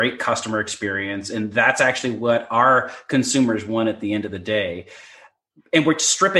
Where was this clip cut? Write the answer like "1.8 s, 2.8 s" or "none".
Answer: none